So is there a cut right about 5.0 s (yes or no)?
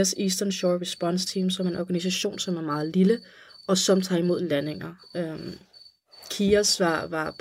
no